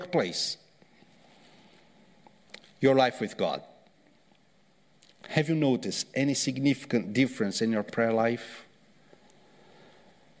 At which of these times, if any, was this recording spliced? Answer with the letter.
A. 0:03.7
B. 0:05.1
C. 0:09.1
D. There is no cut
D